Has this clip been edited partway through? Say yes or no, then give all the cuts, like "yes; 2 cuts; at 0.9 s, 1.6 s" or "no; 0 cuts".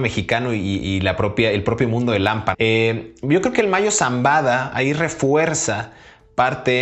yes; 1 cut; at 2.5 s